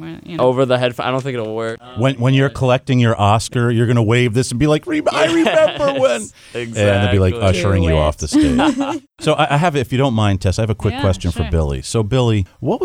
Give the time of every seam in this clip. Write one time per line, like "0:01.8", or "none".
0:09.1